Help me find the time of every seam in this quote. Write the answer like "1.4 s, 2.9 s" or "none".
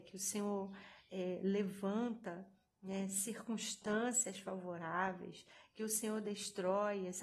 none

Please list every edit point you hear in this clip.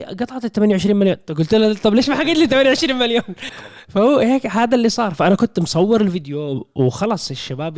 3.5 s

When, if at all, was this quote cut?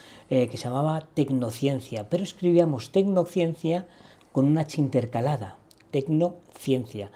none

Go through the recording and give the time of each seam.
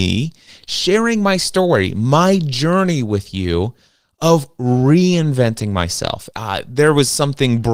6.3 s

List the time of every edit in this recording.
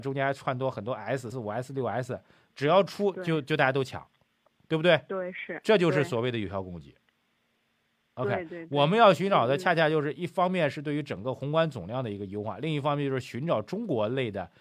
1.3 s

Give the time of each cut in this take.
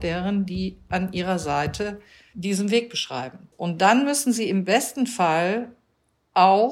3.5 s

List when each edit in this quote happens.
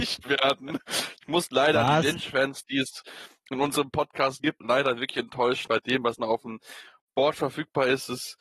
4.6 s, 5.7 s

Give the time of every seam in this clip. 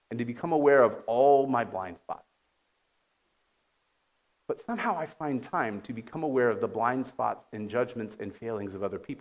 none

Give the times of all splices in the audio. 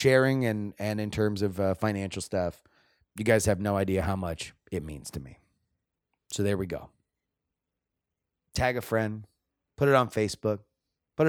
6.3 s

